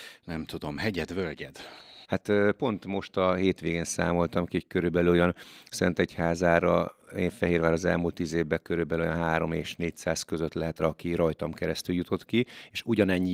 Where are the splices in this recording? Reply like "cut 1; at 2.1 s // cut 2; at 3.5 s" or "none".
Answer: cut 1; at 2.0 s // cut 2; at 10.8 s